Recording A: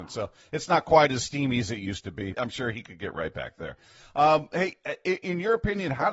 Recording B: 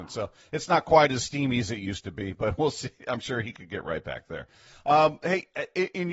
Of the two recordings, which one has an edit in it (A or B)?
A